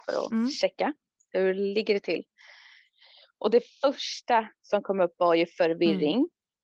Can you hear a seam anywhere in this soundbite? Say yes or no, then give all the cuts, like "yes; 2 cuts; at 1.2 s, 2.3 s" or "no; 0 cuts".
no; 0 cuts